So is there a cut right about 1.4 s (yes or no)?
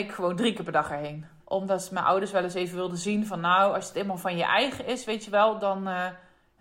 yes